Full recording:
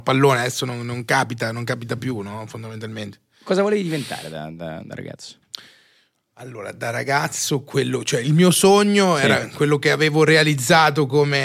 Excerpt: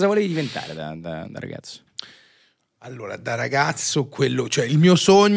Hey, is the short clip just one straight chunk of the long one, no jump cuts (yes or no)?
yes